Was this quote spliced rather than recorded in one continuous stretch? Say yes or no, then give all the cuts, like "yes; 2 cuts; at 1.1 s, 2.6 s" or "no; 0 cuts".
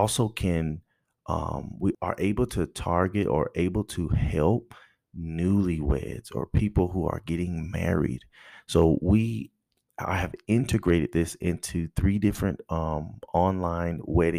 yes; 1 cut; at 1.9 s